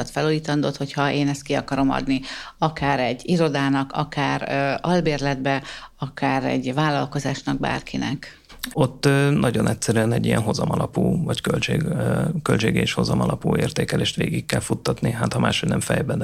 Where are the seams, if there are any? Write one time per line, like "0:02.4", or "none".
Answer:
0:08.7

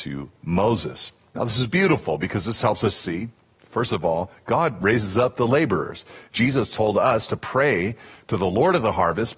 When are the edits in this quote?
none

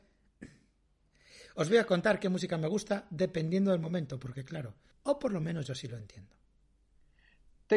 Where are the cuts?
0:04.9

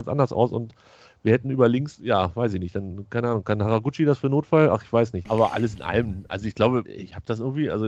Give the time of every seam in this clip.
0:05.3
0:06.9

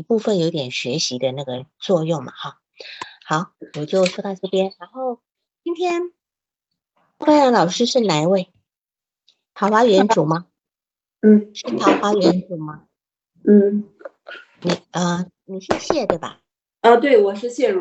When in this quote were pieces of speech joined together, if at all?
0:03.7
0:14.6

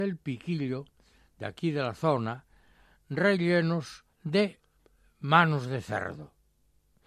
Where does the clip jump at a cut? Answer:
0:04.1

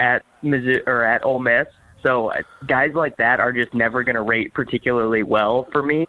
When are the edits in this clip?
none

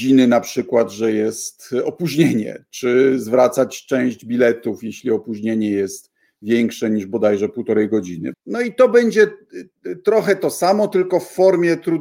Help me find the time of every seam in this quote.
0:08.3

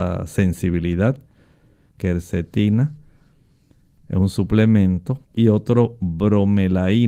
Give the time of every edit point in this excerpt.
0:01.9
0:05.2

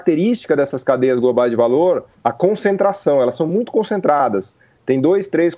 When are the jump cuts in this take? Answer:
none

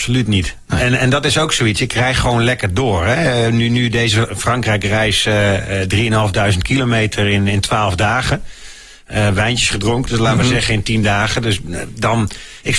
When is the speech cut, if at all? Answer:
0:09.3

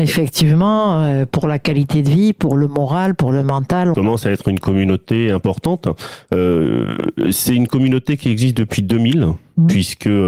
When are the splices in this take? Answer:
0:03.9

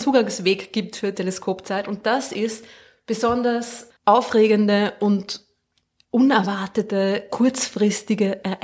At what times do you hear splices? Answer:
0:04.0

